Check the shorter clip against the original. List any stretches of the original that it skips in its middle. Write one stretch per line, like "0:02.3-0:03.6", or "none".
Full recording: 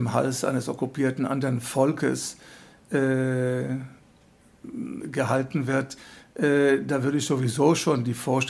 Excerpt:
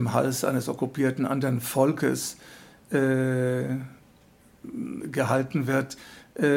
none